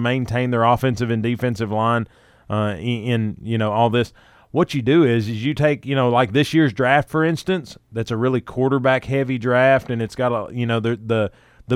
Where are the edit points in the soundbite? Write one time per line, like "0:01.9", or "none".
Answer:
none